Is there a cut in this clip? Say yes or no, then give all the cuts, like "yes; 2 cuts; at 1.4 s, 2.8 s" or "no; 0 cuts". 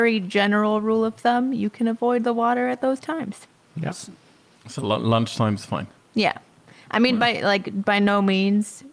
no; 0 cuts